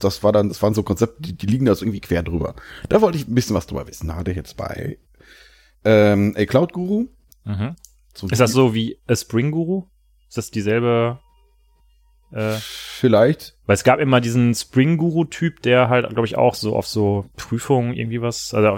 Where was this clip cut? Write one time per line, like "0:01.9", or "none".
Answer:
none